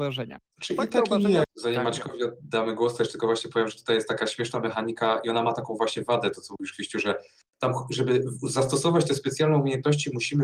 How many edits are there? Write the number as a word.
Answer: one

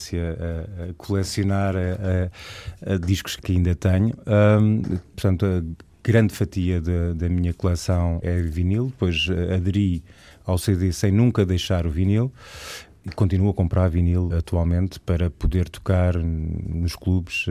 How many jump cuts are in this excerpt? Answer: two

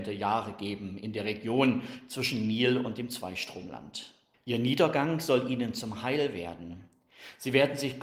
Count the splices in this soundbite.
one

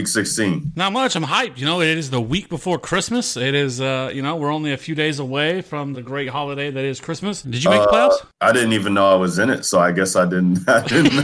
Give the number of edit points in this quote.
two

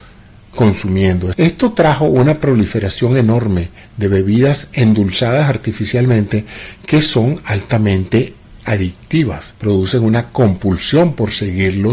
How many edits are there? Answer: two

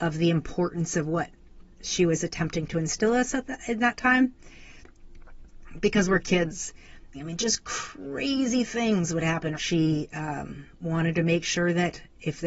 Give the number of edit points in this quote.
two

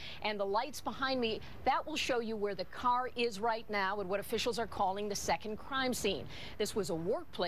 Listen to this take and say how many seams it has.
one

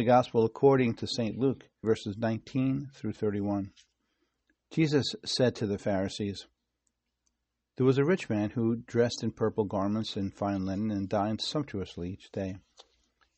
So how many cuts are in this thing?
one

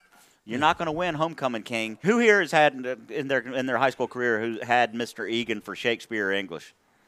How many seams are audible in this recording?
one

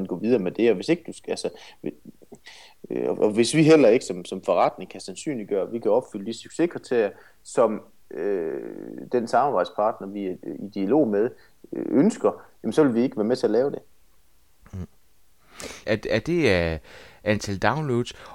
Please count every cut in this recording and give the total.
one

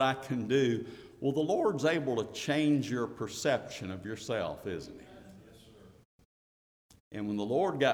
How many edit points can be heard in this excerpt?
zero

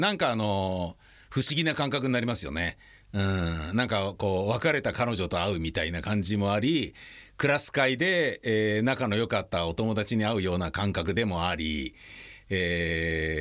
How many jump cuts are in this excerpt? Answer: zero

